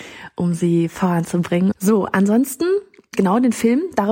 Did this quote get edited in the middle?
yes; 2 cuts; at 1.7 s, 3.1 s

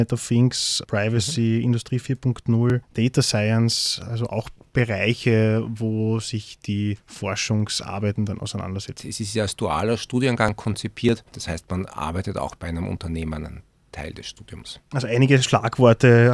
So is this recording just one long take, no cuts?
no; 1 cut; at 9.0 s

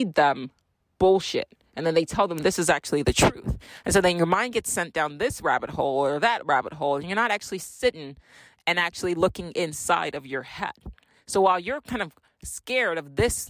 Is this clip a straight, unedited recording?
yes; 0 cuts

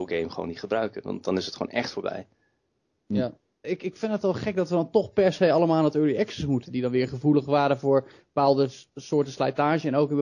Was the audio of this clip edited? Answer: yes; 2 cuts; at 3.6 s, 6.7 s

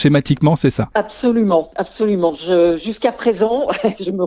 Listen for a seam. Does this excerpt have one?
no; 0 cuts

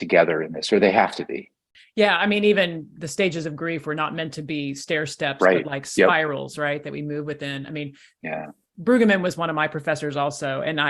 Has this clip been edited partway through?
no; 0 cuts

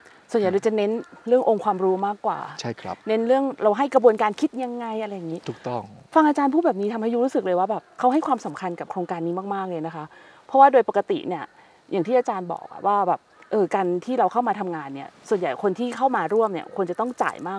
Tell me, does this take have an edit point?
no; 0 cuts

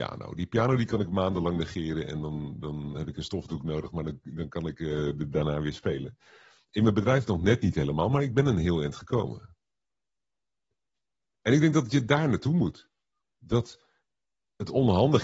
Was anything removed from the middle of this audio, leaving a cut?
no; 0 cuts

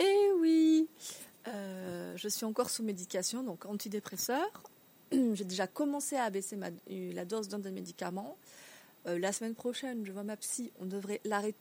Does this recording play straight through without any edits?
yes; 0 cuts

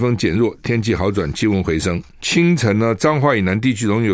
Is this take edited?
yes; 1 cut; at 2.1 s

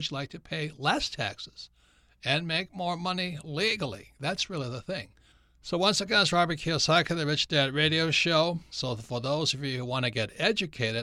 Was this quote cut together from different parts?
yes; 1 cut; at 8.7 s

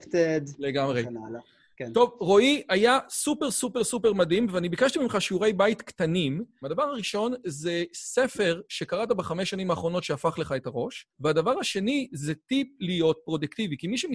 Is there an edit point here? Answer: yes; 2 cuts; at 6.6 s, 11.1 s

